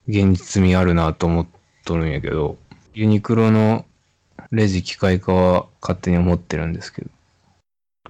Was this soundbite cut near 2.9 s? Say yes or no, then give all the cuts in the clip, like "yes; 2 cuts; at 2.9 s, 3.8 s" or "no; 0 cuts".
yes; 3 cuts; at 2.9 s, 4.5 s, 5.7 s